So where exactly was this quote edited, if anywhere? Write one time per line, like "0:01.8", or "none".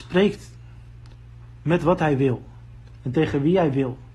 0:03.0